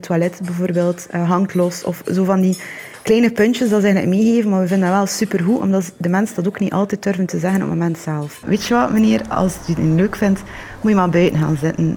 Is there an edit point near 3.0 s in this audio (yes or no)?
no